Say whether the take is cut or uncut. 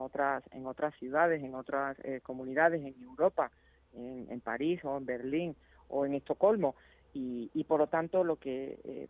uncut